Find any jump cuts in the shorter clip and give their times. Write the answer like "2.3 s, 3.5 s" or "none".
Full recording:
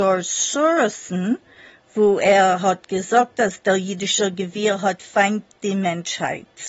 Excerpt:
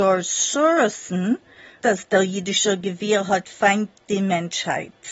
1.8 s